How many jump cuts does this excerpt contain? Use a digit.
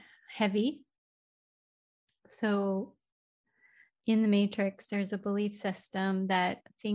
0